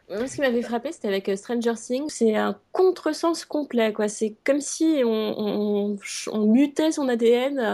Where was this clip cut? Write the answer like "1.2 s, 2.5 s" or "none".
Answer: 2.1 s